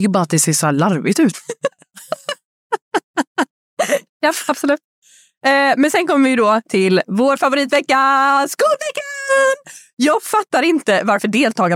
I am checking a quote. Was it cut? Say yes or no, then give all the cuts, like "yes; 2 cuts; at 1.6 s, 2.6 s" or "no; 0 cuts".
yes; 1 cut; at 4.1 s